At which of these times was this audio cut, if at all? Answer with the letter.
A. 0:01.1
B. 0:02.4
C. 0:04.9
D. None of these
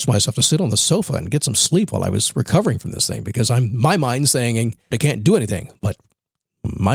C